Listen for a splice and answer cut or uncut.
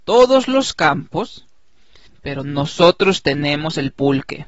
cut